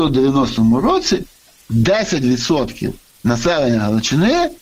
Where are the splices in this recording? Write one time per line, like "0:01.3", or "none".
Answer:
none